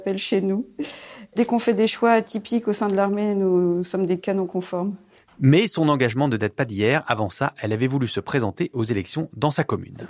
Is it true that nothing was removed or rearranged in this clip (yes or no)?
yes